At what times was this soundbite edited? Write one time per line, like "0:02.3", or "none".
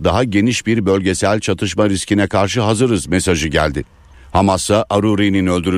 none